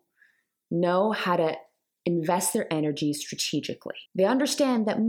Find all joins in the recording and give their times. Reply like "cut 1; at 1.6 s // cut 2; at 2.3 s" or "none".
cut 1; at 4.1 s